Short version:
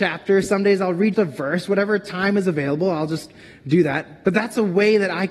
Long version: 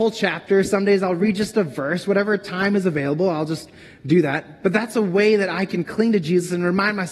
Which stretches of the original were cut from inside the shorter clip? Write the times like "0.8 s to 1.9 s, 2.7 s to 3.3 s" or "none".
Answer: 1.4 s to 1.5 s